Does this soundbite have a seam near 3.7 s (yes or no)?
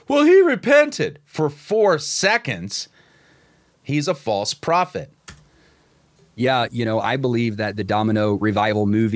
yes